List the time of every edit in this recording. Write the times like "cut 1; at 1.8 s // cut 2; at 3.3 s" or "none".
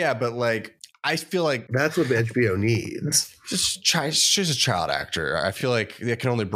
none